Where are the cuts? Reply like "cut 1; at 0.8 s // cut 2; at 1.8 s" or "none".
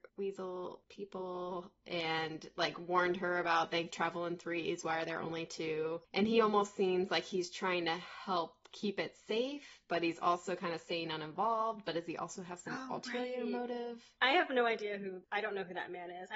none